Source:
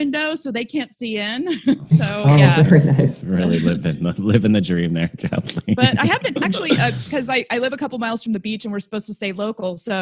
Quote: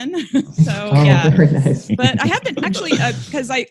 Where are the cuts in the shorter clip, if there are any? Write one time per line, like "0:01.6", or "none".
0:01.9